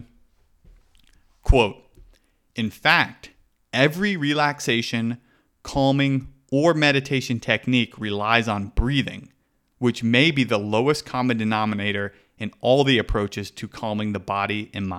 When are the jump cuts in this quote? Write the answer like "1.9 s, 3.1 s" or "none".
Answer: none